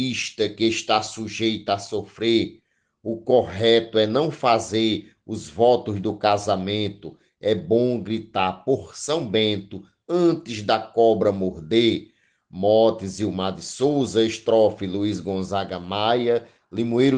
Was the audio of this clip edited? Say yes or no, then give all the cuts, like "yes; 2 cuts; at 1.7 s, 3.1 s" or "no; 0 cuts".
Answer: no; 0 cuts